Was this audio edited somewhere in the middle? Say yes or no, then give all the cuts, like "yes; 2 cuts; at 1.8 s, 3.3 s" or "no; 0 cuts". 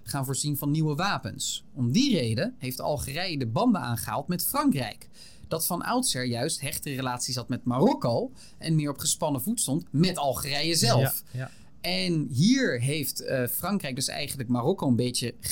no; 0 cuts